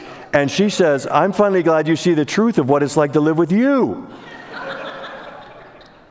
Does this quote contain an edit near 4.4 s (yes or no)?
no